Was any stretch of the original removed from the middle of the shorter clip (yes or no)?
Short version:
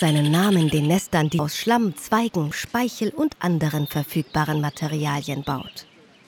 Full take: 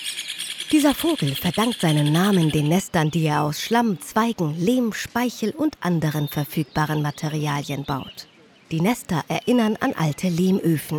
yes